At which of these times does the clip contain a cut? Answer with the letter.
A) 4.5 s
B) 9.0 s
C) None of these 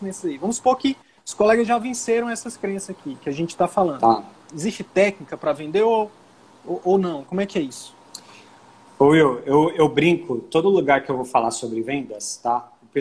A